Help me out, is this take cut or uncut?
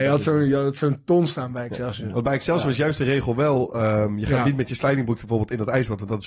uncut